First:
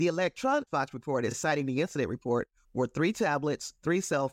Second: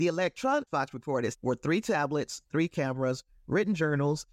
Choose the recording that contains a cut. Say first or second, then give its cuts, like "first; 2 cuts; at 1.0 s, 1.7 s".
second; 2 cuts; at 1.3 s, 2.4 s